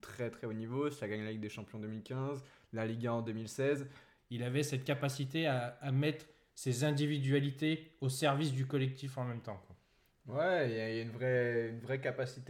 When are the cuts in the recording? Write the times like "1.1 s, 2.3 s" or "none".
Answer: 4.2 s